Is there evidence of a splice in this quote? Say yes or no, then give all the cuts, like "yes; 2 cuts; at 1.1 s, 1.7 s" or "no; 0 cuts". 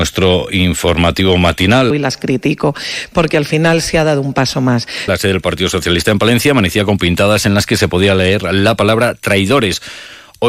yes; 2 cuts; at 1.9 s, 5.1 s